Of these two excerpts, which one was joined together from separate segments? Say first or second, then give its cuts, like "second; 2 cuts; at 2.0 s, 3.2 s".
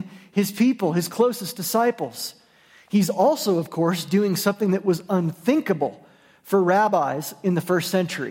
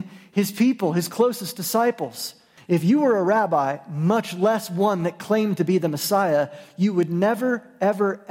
second; 1 cut; at 2.6 s